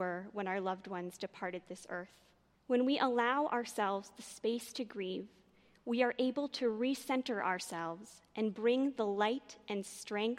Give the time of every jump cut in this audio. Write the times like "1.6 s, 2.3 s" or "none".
2.5 s